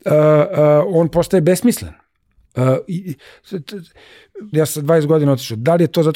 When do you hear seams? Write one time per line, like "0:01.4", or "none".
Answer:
0:02.5
0:04.5